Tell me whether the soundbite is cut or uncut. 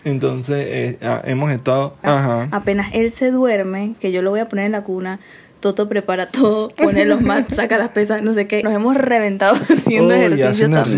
cut